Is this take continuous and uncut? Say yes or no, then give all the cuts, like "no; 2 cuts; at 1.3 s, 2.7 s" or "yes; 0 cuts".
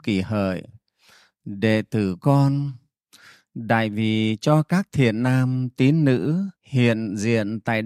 no; 1 cut; at 6.6 s